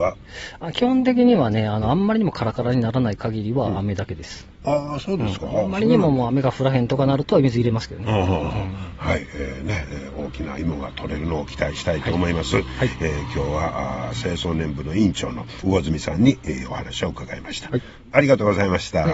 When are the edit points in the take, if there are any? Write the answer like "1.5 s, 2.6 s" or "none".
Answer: none